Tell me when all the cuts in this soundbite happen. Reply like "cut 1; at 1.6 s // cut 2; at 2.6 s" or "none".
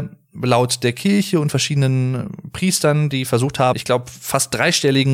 cut 1; at 3.7 s